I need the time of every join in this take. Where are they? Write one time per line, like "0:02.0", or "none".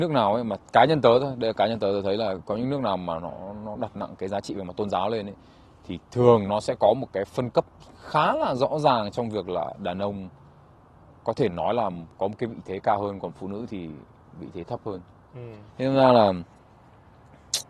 0:11.1
0:15.7

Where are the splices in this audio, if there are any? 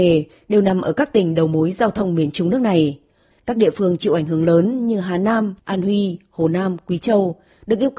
0:03.3
0:05.6

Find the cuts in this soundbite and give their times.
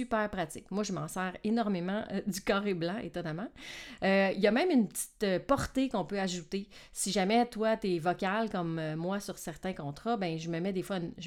none

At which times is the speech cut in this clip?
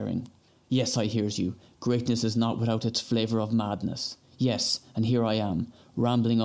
none

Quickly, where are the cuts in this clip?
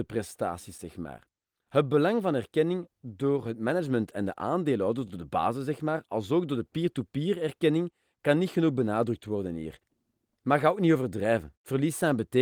none

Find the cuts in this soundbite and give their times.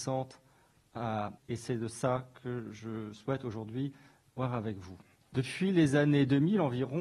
0:01.4
0:05.2

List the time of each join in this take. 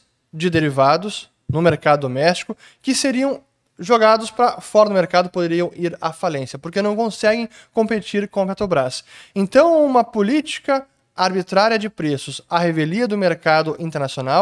none

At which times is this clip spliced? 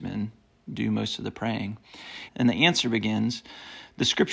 0:02.3

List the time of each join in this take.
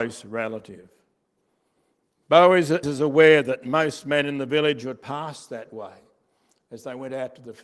0:02.8

